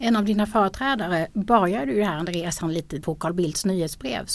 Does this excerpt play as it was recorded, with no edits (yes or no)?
no